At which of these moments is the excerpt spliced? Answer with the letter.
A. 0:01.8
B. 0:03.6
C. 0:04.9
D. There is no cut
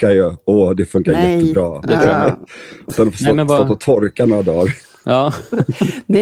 A